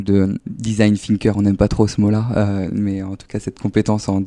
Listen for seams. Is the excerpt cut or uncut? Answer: uncut